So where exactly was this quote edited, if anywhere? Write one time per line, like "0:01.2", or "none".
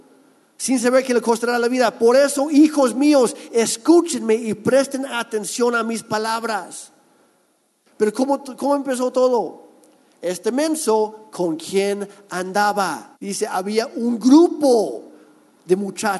0:13.1